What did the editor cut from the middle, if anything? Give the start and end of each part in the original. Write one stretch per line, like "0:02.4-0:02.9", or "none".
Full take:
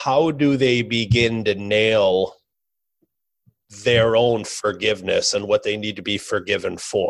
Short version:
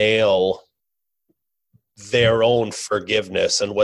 none